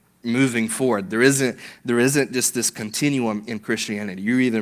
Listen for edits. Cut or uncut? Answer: uncut